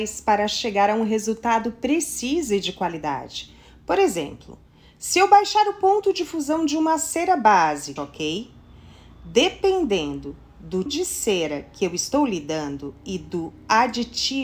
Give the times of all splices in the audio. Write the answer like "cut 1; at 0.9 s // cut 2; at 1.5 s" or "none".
cut 1; at 8.0 s // cut 2; at 10.9 s